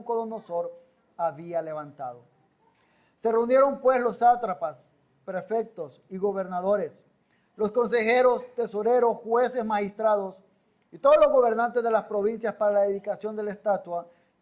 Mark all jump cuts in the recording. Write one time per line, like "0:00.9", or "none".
none